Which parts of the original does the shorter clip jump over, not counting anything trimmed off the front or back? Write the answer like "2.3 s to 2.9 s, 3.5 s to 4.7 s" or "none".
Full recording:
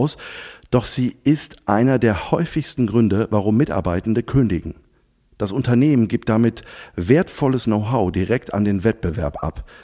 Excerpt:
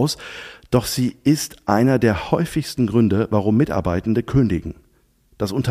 none